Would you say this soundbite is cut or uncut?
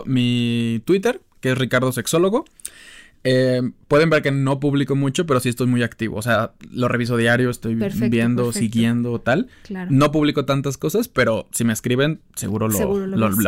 uncut